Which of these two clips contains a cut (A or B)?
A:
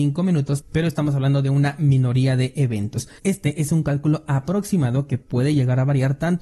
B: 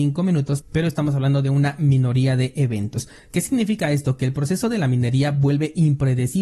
A